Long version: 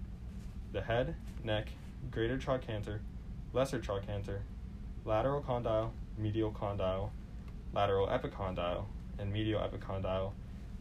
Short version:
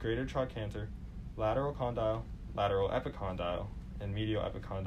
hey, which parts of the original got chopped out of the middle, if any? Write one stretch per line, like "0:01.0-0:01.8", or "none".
0:03.5-0:05.0
0:06.2-0:07.7